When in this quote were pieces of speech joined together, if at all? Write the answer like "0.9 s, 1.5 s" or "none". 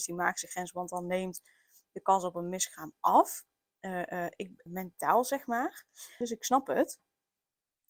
4.7 s, 6.2 s